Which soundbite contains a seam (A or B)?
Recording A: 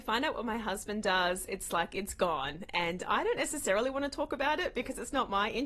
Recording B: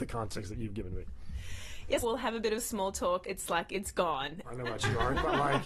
B